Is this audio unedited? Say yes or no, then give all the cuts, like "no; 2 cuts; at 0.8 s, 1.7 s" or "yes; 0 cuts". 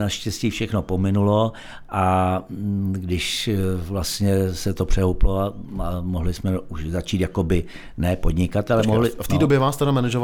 yes; 0 cuts